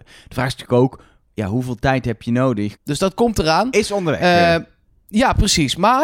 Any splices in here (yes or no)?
yes